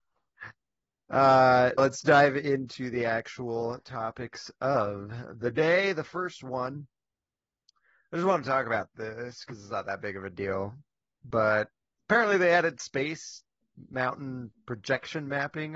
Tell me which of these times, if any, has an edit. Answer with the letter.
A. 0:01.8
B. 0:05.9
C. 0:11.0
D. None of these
A